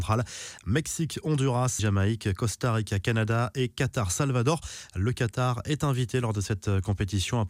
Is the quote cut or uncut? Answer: cut